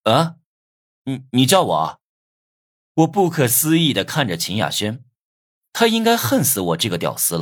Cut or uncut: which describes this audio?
cut